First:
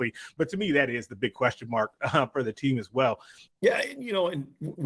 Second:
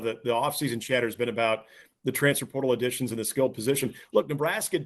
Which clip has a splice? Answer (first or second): first